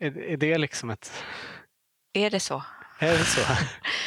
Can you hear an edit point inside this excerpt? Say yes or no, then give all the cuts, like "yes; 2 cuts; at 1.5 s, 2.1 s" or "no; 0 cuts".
no; 0 cuts